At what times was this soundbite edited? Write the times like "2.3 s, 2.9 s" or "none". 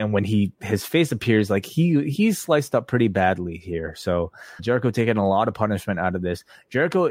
4.6 s